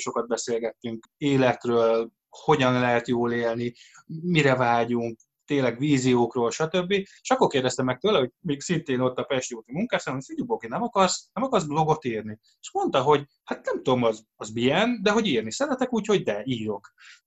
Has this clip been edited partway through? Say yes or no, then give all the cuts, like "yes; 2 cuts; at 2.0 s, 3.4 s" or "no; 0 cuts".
yes; 1 cut; at 7.2 s